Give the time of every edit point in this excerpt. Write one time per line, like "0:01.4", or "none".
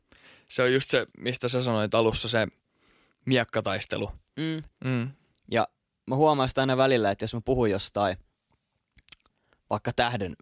0:01.1
0:04.7